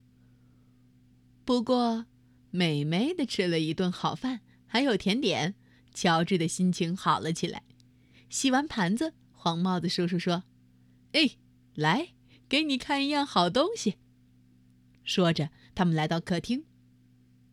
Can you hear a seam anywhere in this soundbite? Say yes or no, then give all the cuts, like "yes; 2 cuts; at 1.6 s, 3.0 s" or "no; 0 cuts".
no; 0 cuts